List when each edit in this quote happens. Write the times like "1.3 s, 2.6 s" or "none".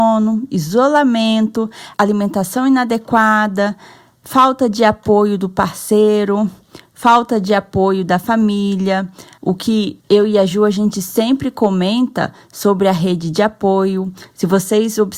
none